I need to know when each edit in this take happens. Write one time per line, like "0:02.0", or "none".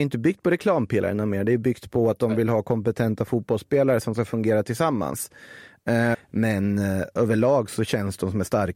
0:06.1